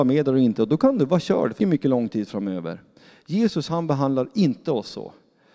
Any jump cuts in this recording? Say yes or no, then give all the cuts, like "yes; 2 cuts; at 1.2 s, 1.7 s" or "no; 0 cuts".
yes; 1 cut; at 1.6 s